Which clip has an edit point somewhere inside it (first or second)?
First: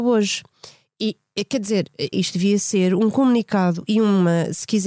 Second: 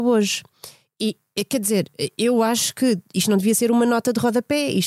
first